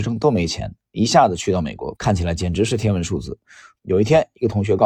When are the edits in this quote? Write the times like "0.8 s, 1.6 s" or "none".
2.0 s, 3.8 s